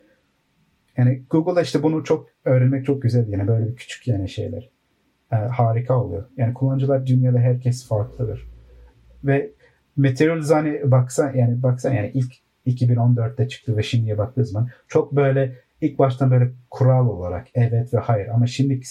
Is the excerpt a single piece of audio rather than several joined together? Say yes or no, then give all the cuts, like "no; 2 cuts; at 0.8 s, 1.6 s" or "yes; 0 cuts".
yes; 0 cuts